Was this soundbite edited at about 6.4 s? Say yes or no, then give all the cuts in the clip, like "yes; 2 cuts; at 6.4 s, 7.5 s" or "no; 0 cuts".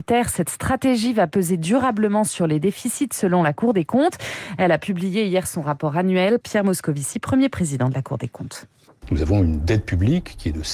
yes; 1 cut; at 6.4 s